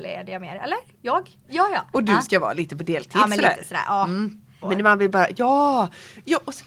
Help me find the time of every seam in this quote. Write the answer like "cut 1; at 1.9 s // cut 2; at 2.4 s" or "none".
cut 1; at 1.4 s // cut 2; at 4.6 s